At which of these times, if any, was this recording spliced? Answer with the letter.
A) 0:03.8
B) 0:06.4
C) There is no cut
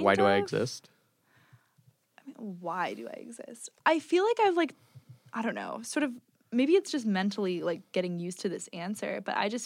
A